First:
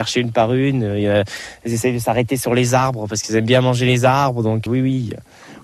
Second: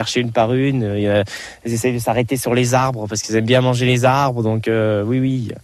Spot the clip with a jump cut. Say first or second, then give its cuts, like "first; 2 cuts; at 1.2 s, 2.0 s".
first; 1 cut; at 4.7 s